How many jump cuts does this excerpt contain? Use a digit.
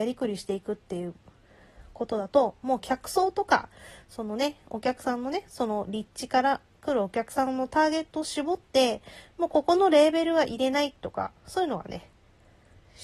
0